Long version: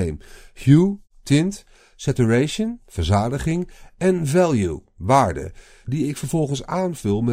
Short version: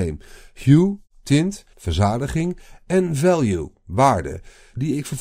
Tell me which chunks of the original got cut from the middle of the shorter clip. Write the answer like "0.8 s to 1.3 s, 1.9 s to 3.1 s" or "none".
1.7 s to 2.8 s